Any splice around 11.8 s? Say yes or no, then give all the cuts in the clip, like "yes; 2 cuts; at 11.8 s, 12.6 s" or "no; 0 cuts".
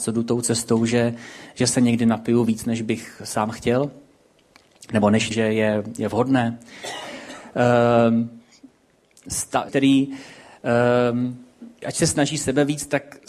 yes; 3 cuts; at 5.3 s, 9.7 s, 11.8 s